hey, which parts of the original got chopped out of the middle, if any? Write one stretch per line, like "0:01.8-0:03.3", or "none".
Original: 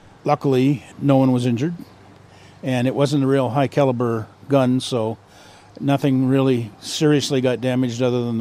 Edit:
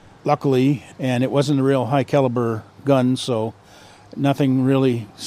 0:00.9-0:02.6